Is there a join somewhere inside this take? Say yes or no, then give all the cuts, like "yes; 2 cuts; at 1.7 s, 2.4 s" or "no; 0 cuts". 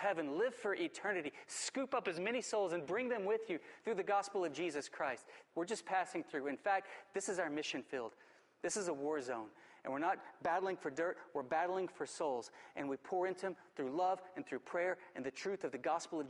yes; 1 cut; at 5.5 s